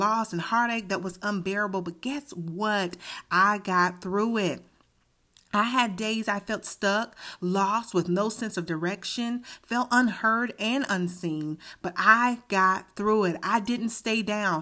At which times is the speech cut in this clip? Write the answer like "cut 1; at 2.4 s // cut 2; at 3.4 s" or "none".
none